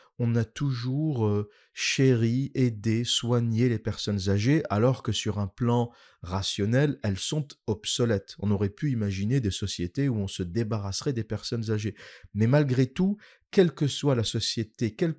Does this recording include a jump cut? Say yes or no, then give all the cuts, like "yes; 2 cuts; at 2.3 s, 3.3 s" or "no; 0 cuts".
no; 0 cuts